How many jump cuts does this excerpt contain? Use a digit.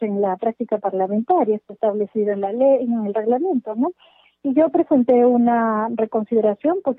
0